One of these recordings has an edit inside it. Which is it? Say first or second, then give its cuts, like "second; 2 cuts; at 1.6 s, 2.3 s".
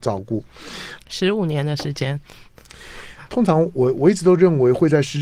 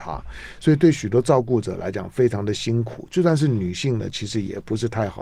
first; 1 cut; at 1.0 s